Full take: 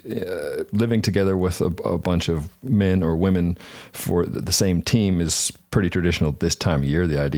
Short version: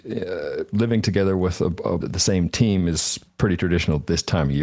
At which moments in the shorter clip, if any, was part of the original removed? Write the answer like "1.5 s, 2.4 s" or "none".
2.0 s

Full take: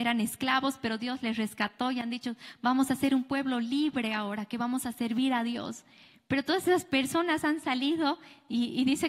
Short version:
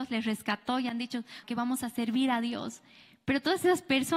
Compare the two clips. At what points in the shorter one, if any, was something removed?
1.4 s

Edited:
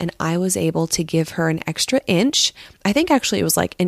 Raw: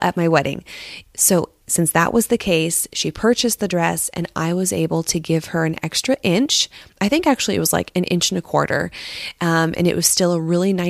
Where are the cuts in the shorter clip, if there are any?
none

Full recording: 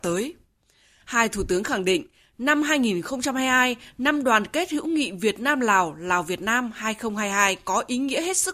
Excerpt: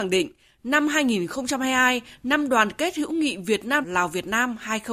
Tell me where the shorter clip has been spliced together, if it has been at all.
3.8 s

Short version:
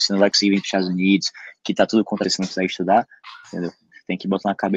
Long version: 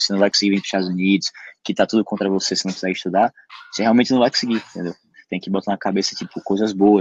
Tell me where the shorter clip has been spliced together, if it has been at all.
2.2 s, 3.4 s

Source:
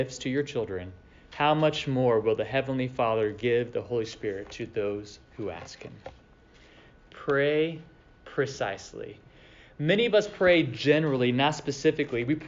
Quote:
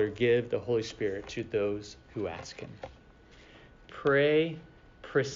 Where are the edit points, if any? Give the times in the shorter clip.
none

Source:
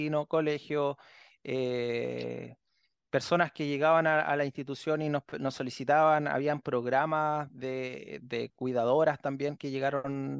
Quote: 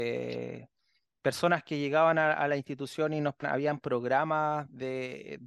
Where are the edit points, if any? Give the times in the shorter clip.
3.4 s

